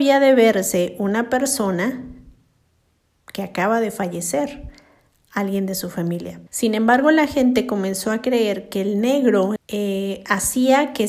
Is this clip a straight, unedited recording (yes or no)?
no